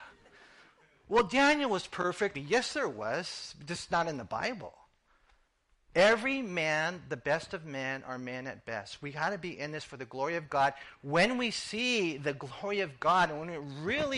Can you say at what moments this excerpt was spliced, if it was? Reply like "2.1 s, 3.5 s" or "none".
2.3 s